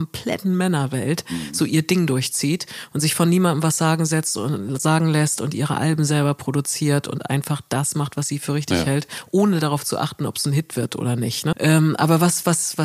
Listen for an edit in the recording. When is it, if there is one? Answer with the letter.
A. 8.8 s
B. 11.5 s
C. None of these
B